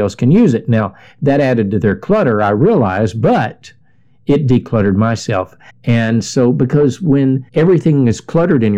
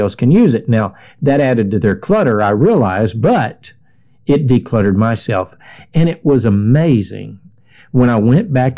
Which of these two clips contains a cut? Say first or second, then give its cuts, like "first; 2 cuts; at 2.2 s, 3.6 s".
first; 2 cuts; at 5.7 s, 7.5 s